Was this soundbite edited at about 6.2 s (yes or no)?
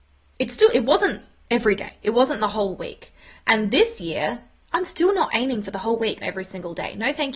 yes